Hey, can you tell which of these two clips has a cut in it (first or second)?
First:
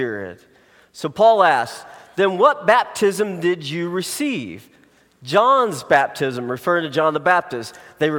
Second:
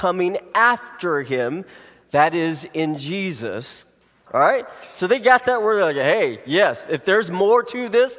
second